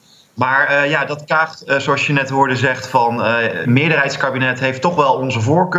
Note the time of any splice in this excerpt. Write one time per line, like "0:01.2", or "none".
0:03.6